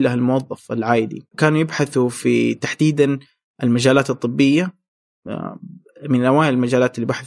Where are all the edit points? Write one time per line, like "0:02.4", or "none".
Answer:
none